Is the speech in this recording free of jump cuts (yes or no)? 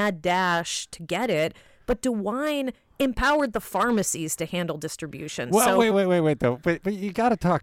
no